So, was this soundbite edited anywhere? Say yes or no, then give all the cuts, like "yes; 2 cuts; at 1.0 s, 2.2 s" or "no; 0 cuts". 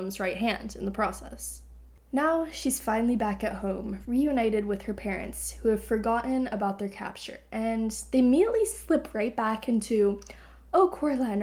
no; 0 cuts